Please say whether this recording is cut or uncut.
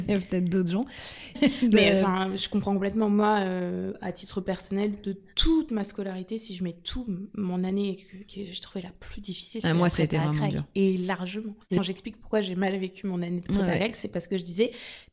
uncut